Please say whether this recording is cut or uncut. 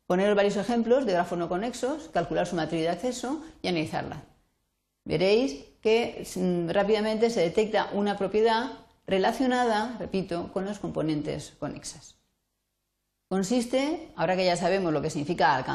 cut